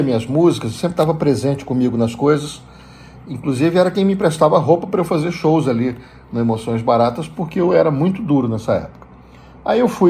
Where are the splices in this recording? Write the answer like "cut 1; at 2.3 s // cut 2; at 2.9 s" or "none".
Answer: none